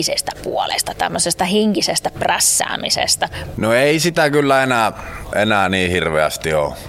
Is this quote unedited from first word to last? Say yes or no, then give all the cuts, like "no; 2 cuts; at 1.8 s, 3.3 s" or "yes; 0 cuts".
no; 1 cut; at 3.5 s